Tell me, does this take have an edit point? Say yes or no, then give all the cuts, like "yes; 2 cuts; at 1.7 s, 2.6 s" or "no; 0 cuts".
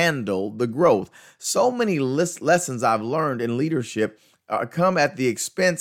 no; 0 cuts